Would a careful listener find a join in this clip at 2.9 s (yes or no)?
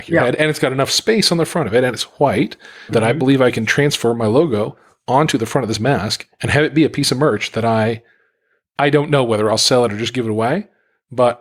yes